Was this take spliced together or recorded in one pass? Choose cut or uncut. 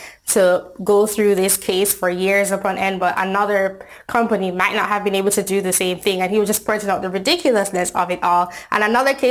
uncut